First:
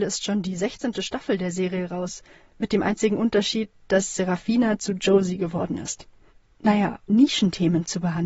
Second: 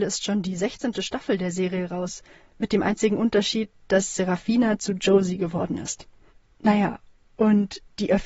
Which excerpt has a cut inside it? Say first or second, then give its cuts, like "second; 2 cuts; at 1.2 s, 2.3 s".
first; 1 cut; at 7.1 s